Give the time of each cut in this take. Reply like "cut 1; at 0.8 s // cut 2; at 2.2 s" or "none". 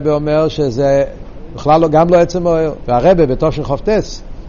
cut 1; at 2.9 s